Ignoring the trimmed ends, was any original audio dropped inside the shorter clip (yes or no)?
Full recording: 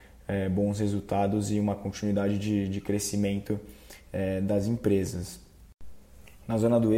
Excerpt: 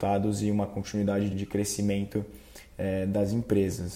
yes